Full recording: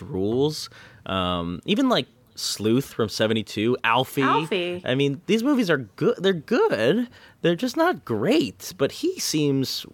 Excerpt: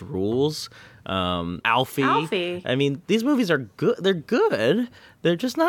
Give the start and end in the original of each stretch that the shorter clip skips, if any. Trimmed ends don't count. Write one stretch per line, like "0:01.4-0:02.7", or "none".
0:01.6-0:03.8

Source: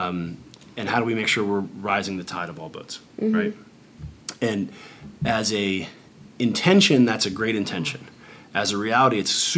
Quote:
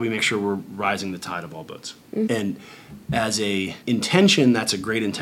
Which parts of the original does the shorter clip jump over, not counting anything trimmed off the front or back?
0:03.3-0:04.4
0:05.9-0:06.3

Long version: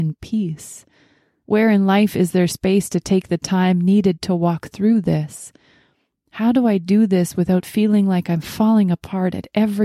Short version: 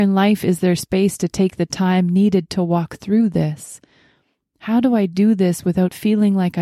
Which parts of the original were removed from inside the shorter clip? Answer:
none

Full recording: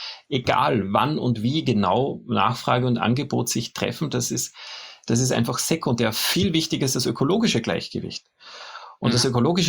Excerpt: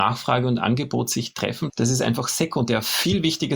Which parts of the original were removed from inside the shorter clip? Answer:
0:04.1-0:05.0

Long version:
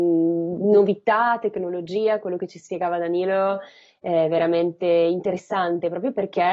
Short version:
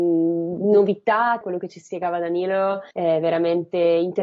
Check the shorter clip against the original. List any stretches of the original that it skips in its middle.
0:01.4-0:02.2
0:03.7-0:04.0

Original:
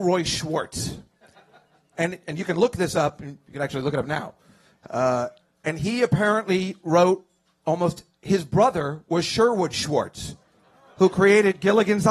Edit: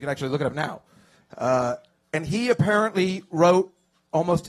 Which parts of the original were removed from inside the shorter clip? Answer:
none

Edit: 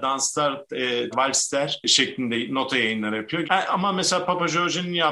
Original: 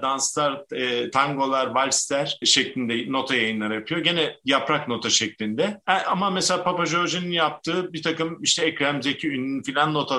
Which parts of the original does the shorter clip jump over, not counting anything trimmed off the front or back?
0:01.1-0:01.7
0:04.0-0:05.8

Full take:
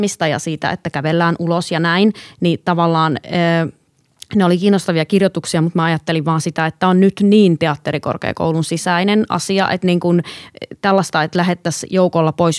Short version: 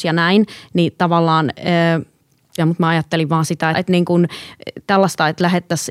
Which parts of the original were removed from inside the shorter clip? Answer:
0:04.2-0:05.5
0:06.7-0:09.7

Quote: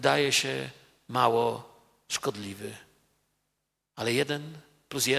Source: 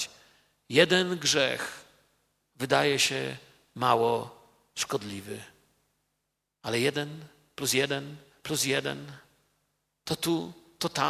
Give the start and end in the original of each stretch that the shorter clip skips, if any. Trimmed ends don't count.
none

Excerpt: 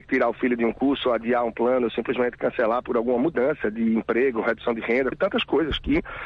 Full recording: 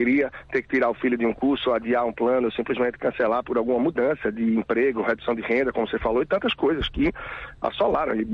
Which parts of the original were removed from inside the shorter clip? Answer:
0:05.7-0:06.2

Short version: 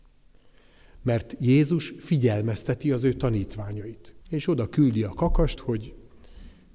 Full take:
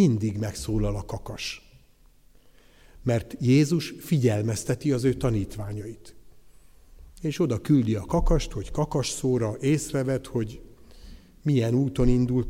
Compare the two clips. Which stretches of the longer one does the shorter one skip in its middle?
0:06.2-0:07.1
0:08.5-0:10.2

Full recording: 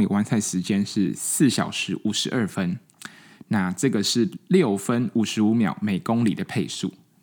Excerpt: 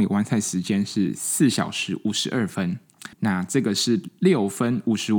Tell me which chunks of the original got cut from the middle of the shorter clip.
0:03.1-0:03.4

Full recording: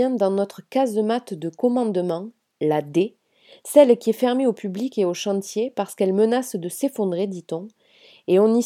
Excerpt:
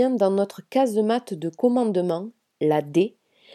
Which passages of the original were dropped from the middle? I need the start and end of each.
none

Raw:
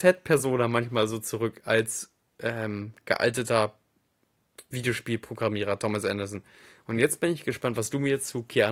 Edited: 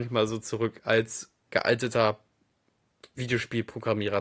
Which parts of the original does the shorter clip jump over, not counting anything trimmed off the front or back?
0:02.3-0:03.0

